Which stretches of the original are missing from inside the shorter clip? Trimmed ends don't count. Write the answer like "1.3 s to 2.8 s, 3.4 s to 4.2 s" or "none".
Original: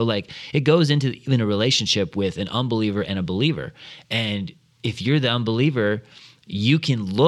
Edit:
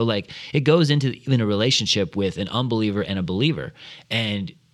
none